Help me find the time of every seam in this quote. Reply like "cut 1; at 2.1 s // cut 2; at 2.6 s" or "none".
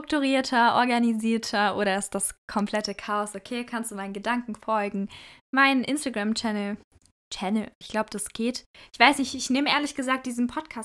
cut 1; at 7.8 s